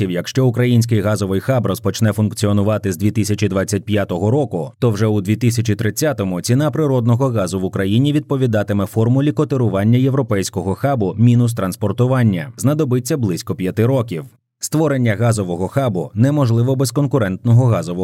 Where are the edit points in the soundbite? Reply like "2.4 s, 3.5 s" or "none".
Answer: 12.6 s, 14.4 s